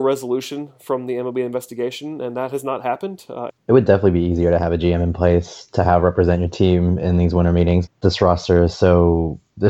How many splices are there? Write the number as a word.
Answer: two